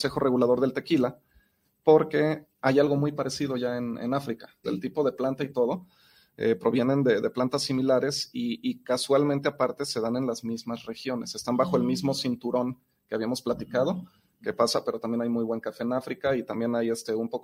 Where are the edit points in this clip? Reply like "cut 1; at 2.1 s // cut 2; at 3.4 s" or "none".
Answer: cut 1; at 4.6 s // cut 2; at 14.8 s